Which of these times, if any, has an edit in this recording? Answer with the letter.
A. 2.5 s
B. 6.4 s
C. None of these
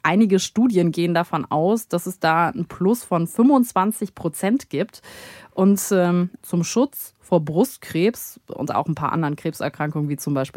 B